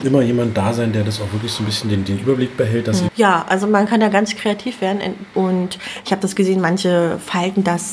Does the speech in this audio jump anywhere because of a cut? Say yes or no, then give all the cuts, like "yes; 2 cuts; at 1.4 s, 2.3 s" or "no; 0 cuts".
yes; 2 cuts; at 3.1 s, 5.3 s